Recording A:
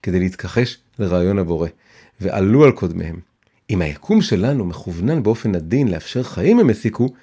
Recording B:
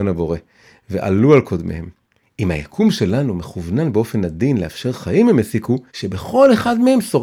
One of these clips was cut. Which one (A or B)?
B